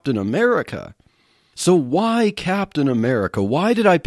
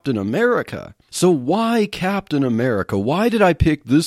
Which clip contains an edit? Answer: second; 1 cut; at 1.0 s

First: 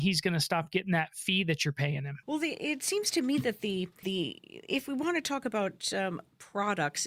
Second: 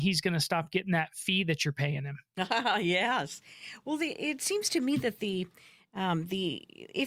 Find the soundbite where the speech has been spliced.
first; 2 cuts; at 2.2 s, 4.0 s

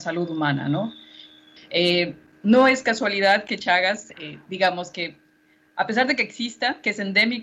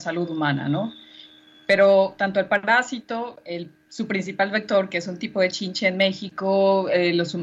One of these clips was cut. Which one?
first; 1 cut; at 1.6 s

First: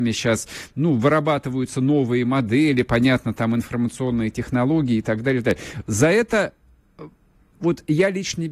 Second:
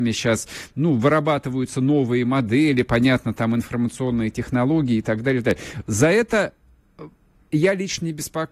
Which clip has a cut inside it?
second; 1 cut; at 7.5 s

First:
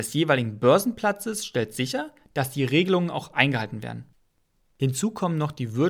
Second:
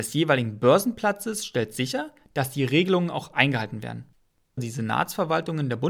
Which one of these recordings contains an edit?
second; 1 cut; at 4.6 s

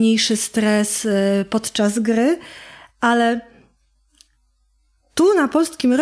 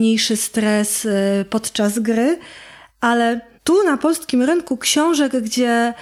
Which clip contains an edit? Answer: second; 1 cut; at 3.6 s

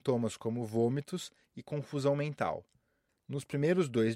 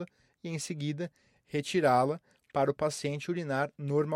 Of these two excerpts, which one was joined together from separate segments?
first; 1 cut; at 3.1 s

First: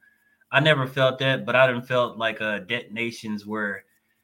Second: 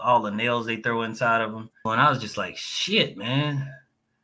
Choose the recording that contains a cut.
second; 1 cut; at 1.9 s

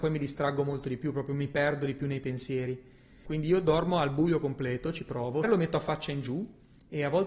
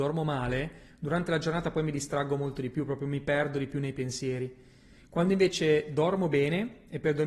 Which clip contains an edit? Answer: first; 2 cuts; at 3.2 s, 5.4 s

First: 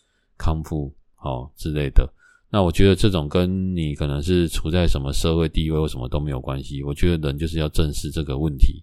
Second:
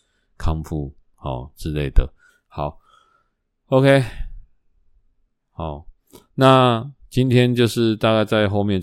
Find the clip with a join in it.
second; 1 cut; at 2.3 s

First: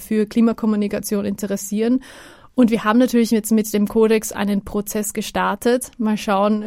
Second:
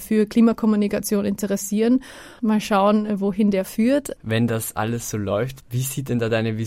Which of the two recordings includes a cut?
second; 3 cuts; at 2.4 s, 4.2 s, 5.6 s

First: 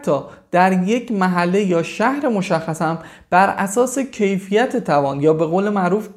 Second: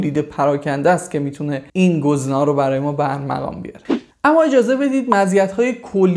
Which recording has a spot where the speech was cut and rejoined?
second; 1 cut; at 1.7 s

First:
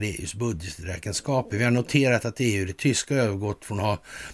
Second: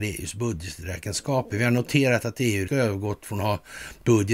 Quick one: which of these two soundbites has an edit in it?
second; 1 cut; at 2.7 s

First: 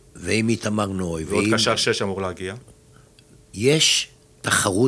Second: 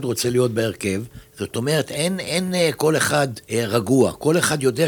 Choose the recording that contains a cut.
second; 2 cuts; at 1.2 s, 3.4 s

